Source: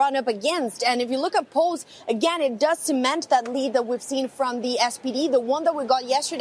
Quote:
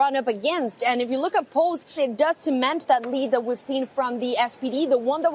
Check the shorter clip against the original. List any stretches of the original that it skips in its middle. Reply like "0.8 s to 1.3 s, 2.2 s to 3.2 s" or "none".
2.0 s to 2.4 s